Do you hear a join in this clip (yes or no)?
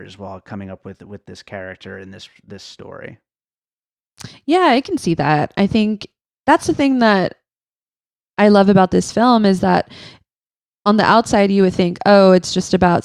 no